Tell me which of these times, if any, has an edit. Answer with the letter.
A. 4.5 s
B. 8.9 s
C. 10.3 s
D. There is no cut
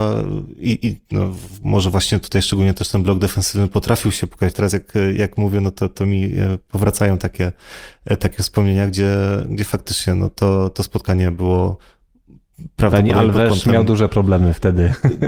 A